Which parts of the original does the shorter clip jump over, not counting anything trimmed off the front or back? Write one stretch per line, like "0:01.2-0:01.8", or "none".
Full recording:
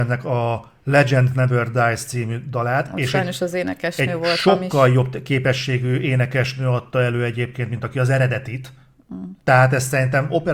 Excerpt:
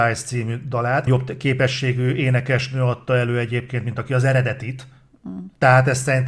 0:02.9-0:04.9